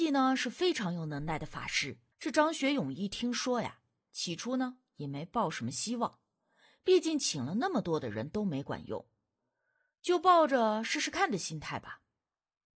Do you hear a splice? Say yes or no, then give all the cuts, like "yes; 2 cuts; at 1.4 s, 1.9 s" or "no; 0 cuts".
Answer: yes; 1 cut; at 2.1 s